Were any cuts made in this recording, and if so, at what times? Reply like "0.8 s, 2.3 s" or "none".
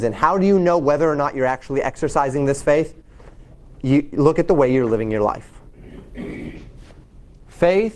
none